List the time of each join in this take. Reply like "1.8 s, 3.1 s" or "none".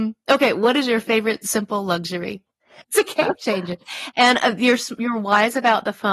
2.8 s